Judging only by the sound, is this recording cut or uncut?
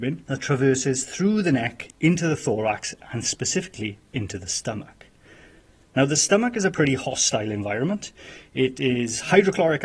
uncut